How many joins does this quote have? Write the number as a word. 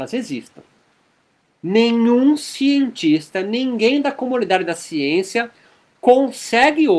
zero